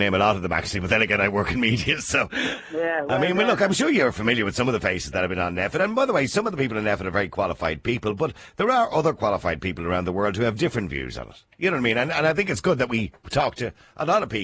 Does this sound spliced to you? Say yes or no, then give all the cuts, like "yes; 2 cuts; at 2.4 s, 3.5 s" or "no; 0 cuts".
no; 0 cuts